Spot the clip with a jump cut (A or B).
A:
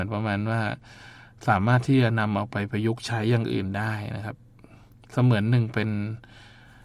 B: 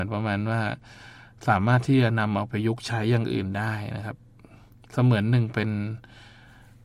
B